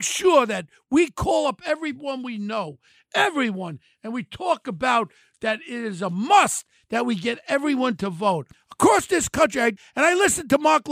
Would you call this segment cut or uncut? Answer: uncut